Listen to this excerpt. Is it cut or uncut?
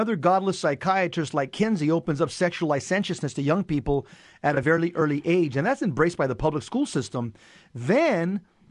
uncut